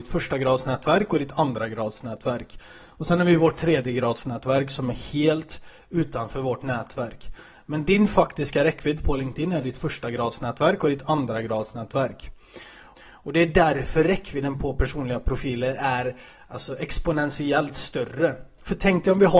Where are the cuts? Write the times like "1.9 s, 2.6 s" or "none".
13.0 s